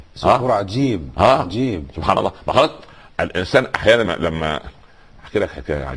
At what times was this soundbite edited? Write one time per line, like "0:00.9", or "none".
0:04.0